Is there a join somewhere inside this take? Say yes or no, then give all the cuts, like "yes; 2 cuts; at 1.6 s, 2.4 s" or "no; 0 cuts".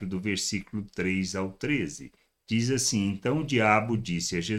no; 0 cuts